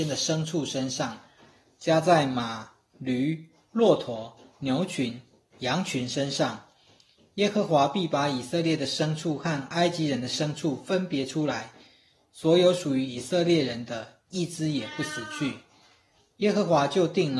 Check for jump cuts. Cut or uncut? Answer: uncut